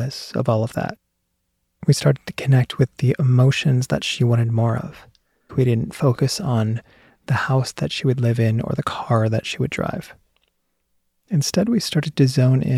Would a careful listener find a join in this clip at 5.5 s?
yes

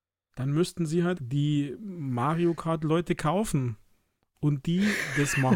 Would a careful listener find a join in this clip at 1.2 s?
yes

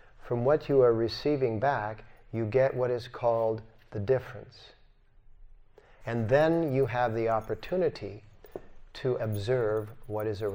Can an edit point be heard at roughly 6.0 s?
yes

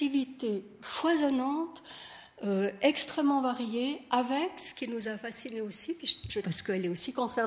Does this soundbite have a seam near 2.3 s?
no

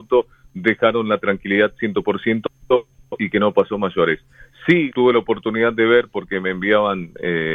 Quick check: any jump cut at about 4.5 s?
no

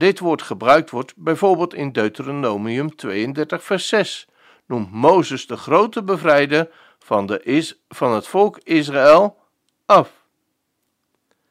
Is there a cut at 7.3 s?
no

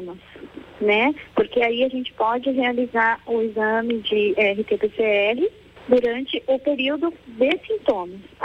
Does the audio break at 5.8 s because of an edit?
yes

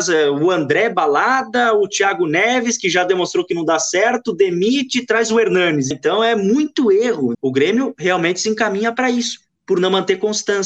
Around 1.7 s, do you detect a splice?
no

